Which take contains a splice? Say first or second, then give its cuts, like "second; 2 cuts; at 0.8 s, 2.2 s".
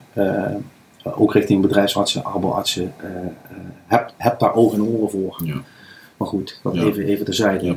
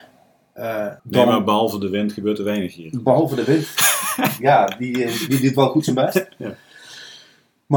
second; 1 cut; at 1.0 s